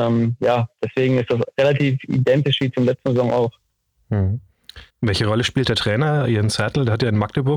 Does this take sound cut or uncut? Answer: cut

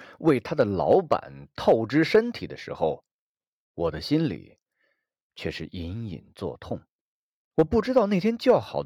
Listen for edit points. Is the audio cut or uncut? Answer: uncut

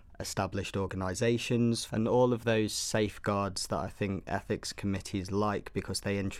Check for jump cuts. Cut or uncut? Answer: cut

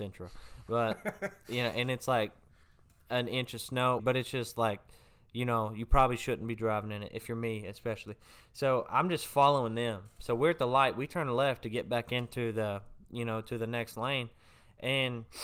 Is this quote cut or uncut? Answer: cut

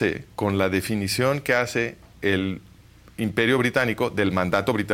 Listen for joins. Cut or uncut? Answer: uncut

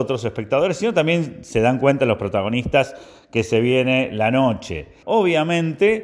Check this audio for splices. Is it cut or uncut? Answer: cut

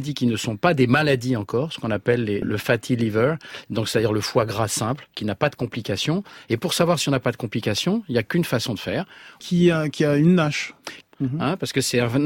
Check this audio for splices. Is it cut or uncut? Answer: cut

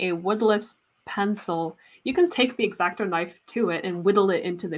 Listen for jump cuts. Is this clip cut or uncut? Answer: cut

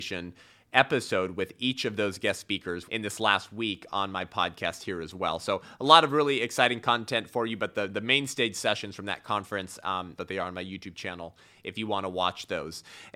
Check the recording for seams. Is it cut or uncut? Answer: cut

